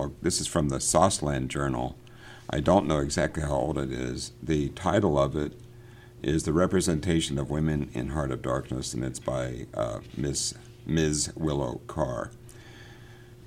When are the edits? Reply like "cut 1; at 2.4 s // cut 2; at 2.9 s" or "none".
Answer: none